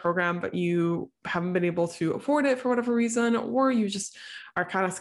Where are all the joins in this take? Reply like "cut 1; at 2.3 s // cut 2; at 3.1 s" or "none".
none